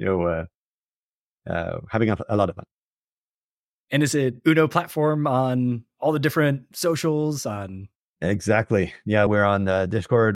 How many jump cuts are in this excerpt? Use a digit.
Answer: 2